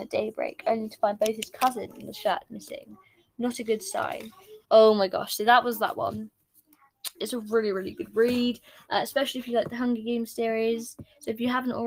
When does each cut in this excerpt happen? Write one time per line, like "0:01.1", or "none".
0:04.6
0:07.1